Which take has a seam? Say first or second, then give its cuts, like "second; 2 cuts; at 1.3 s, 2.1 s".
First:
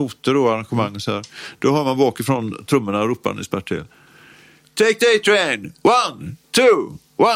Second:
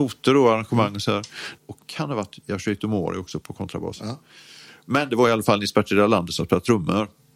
second; 2 cuts; at 1.6 s, 3.4 s